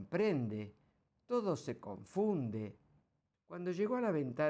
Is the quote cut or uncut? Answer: cut